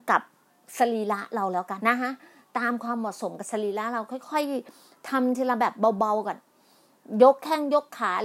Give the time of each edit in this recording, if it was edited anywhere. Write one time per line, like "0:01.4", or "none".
0:01.8